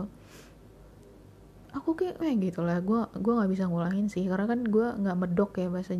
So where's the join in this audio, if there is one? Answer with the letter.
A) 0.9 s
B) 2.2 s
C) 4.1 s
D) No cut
B